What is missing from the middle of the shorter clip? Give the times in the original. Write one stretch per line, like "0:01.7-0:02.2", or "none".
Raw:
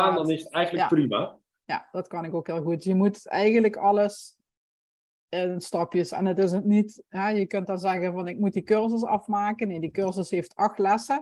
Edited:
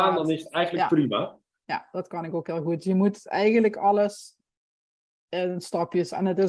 none